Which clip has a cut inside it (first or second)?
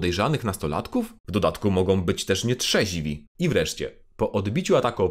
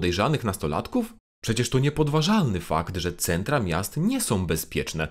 first